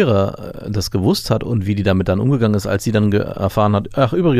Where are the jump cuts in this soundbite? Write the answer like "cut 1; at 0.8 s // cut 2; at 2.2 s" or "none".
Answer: none

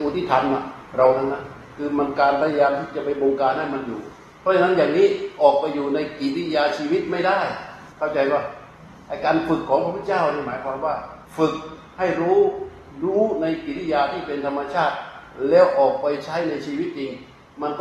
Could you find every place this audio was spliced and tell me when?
cut 1; at 7.9 s // cut 2; at 11.2 s

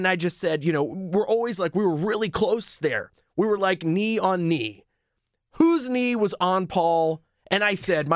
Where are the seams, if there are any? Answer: none

